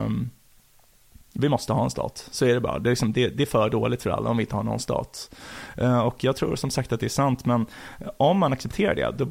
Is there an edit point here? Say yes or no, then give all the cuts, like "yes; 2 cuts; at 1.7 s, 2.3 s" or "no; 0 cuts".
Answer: no; 0 cuts